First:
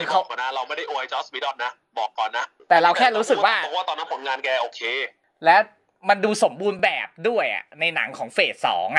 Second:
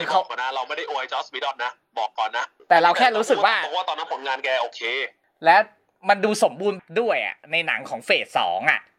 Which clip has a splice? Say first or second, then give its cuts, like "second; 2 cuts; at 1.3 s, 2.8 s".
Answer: second; 1 cut; at 6.8 s